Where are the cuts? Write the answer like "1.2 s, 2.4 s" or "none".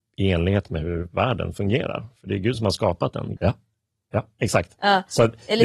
3.4 s